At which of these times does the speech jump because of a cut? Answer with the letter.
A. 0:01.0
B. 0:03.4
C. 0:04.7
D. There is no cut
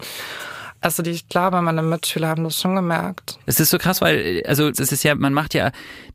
C